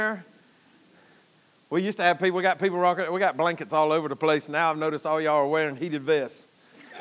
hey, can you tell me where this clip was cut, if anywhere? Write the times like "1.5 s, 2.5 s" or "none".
none